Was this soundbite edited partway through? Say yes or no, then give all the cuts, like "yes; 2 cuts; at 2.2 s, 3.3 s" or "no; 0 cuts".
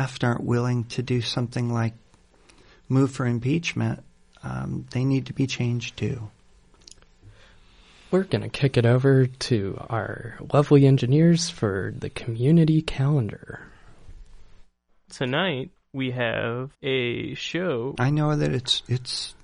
yes; 3 cuts; at 15.1 s, 16.7 s, 18.0 s